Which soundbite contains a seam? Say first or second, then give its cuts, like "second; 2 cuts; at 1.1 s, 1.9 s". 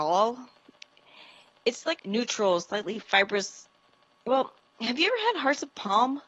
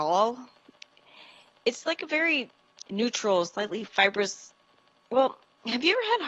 first; 1 cut; at 2.0 s